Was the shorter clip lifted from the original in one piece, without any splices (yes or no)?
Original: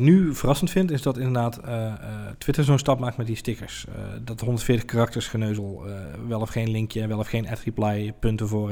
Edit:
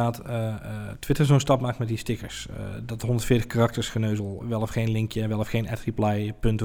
no